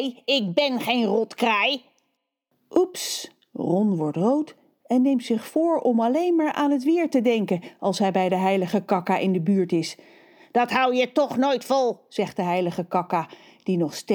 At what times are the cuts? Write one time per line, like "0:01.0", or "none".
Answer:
none